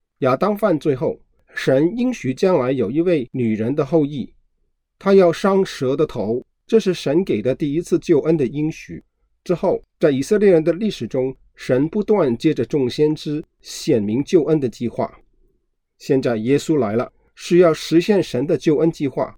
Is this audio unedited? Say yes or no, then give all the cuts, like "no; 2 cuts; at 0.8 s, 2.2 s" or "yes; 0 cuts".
no; 1 cut; at 6.5 s